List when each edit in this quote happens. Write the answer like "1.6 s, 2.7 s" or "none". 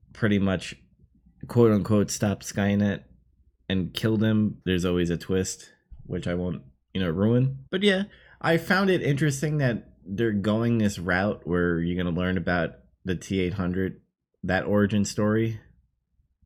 4.6 s, 7.7 s